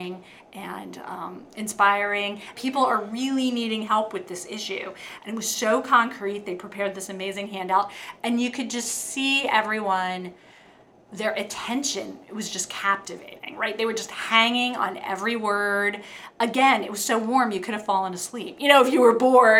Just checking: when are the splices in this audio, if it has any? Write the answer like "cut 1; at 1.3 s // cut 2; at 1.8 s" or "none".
cut 1; at 2.5 s

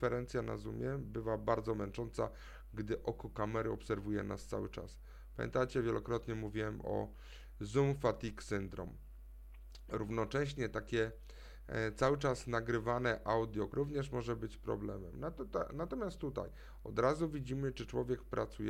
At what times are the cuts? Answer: cut 1; at 13.7 s

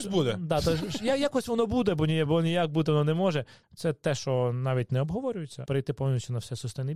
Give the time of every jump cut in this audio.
cut 1; at 2.3 s // cut 2; at 3.6 s // cut 3; at 5.7 s

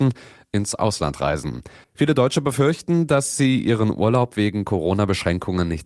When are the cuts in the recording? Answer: cut 1; at 1.8 s

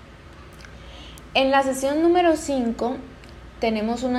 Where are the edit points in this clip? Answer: none

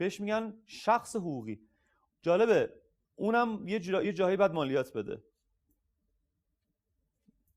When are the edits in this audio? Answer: none

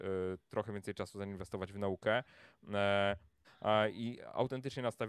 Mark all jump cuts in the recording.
cut 1; at 3.4 s

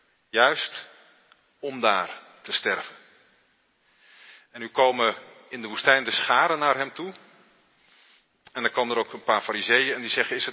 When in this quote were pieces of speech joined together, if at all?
none

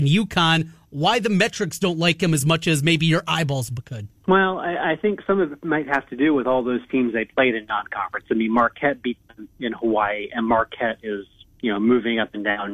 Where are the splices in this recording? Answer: cut 1; at 4.2 s

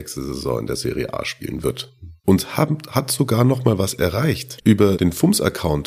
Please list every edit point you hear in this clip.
cut 1; at 2.2 s // cut 2; at 4.6 s

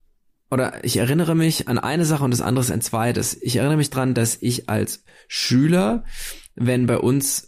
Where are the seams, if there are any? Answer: none

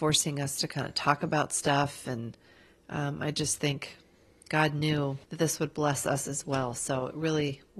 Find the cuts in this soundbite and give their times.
cut 1; at 5.2 s

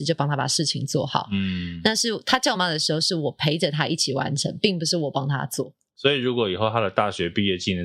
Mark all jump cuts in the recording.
cut 1; at 2.5 s

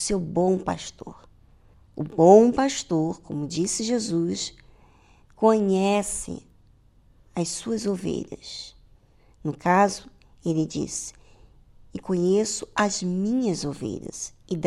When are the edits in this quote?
none

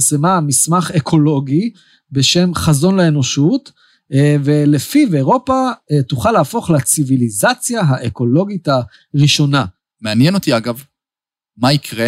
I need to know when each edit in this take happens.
cut 1; at 9.9 s

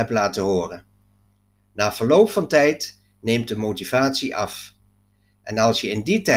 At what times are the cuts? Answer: none

